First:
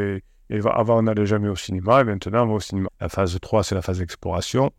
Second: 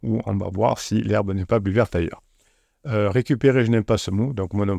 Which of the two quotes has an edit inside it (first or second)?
first